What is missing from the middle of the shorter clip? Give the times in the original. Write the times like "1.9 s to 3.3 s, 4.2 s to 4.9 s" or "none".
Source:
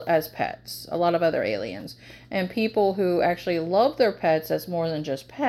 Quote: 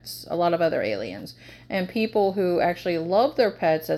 none

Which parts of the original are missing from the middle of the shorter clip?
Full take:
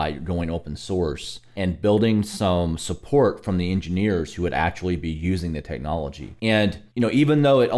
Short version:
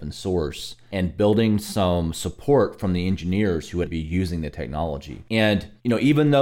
4.5 s to 5.0 s

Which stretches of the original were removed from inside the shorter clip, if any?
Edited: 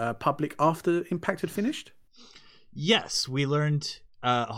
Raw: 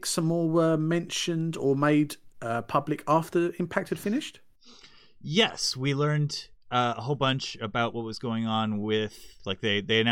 none

